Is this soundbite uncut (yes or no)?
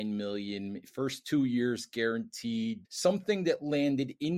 no